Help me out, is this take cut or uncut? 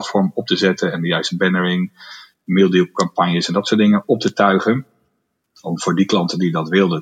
uncut